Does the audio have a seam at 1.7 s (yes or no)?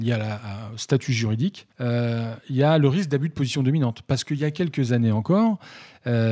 yes